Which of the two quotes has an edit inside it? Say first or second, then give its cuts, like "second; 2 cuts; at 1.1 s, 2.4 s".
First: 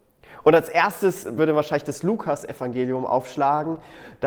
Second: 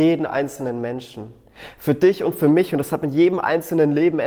first; 1 cut; at 1.4 s